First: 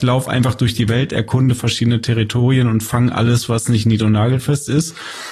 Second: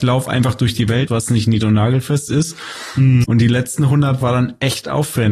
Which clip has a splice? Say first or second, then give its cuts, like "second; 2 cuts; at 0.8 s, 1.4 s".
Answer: second; 2 cuts; at 1.1 s, 3.2 s